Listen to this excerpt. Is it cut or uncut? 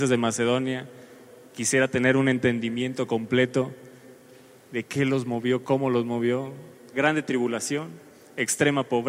cut